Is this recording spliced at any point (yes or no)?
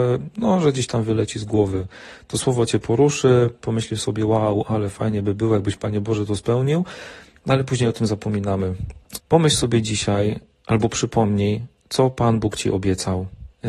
yes